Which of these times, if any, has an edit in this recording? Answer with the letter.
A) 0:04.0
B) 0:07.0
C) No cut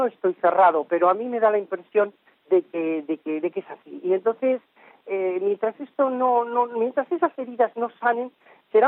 C